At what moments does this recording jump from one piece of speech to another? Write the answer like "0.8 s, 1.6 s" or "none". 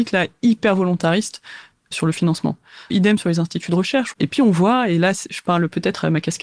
2.9 s, 4.1 s